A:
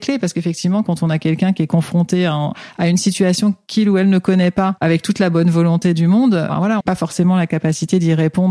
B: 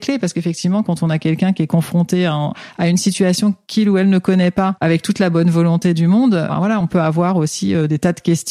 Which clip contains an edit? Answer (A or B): A